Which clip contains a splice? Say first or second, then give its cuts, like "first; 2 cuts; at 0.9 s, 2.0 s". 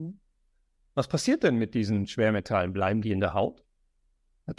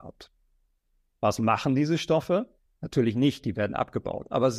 second; 1 cut; at 2.7 s